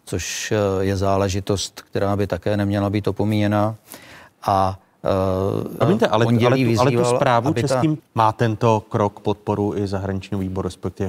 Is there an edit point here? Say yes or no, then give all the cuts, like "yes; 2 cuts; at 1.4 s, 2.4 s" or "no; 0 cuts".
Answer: yes; 2 cuts; at 5.8 s, 8.0 s